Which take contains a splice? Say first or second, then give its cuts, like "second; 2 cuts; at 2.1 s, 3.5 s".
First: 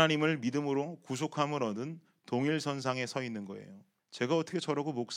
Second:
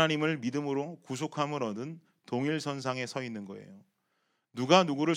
first; 1 cut; at 4.0 s